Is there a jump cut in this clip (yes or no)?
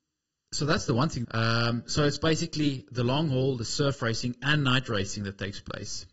yes